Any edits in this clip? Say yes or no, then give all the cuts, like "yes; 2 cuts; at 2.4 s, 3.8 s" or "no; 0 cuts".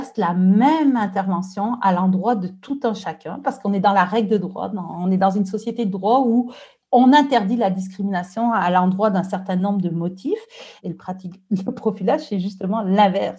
yes; 1 cut; at 10.8 s